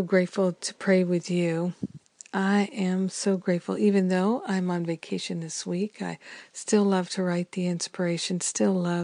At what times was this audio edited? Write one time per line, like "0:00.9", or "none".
none

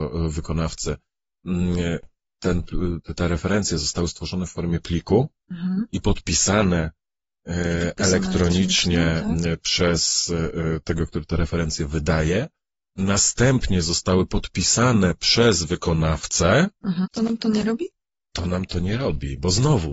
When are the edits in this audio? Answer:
0:17.0

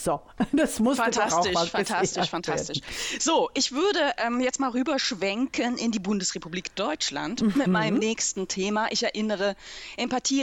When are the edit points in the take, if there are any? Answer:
none

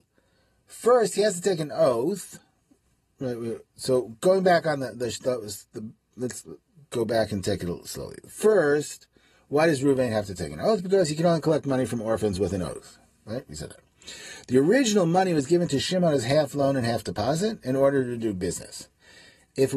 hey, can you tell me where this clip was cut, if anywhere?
none

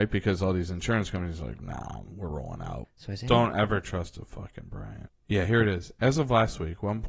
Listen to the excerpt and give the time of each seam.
0:02.8
0:05.1

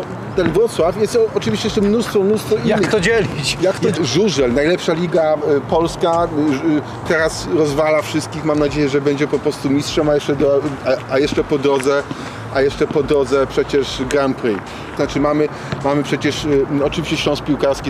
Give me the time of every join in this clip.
0:04.0
0:07.1
0:15.0

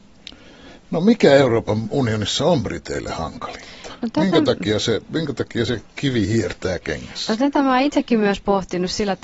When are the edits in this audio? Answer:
none

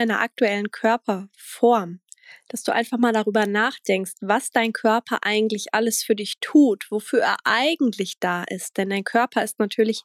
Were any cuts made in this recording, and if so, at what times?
none

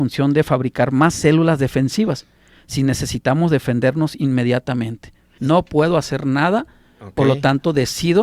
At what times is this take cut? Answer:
0:05.4

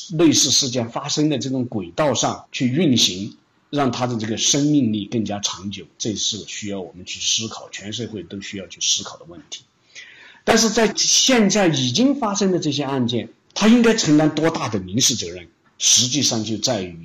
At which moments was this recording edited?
none

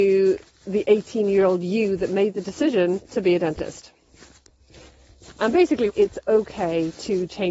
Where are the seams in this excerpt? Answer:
0:05.9

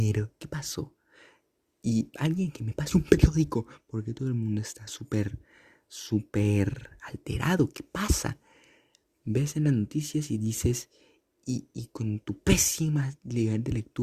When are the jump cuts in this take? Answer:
none

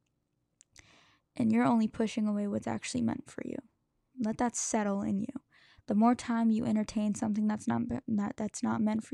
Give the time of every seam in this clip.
0:04.1

